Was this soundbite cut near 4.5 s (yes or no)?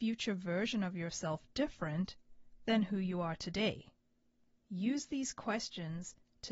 no